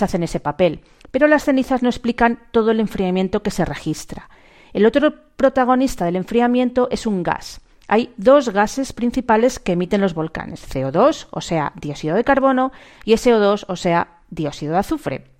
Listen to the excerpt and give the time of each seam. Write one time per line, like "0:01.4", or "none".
none